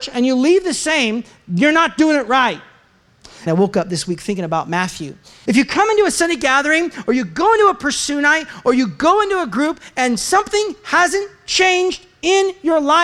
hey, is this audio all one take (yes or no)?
no